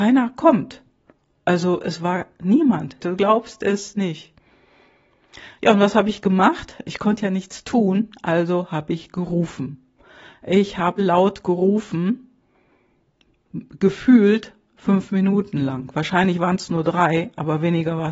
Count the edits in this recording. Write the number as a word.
two